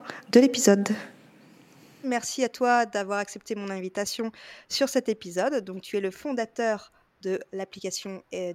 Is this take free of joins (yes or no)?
no